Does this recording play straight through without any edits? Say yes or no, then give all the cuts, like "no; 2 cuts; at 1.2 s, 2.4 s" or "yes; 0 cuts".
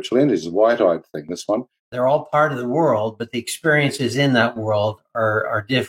no; 1 cut; at 1.8 s